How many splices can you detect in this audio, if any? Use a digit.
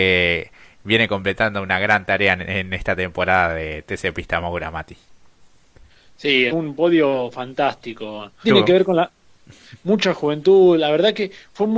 2